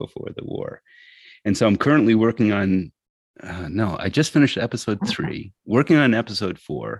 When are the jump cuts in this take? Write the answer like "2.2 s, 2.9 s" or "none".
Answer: none